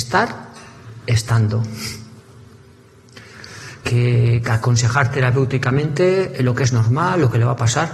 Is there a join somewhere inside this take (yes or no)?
yes